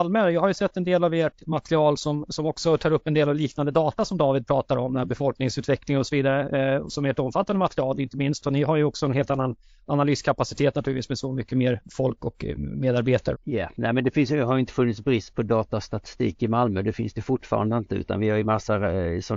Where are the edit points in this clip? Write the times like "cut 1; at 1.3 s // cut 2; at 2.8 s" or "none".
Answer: cut 1; at 13.3 s